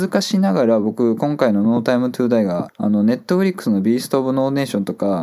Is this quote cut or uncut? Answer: cut